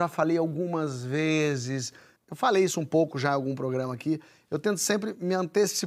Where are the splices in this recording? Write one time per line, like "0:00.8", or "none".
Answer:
0:02.2